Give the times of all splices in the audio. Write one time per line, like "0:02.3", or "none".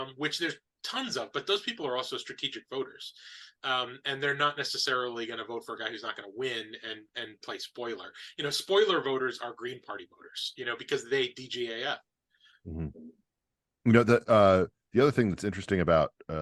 none

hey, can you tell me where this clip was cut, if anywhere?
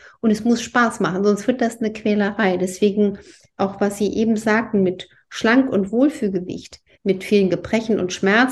0:06.9

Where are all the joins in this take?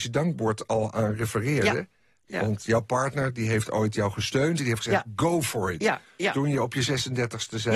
none

